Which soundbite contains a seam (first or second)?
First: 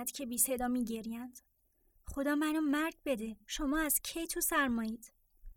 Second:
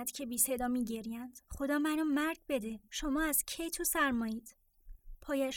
second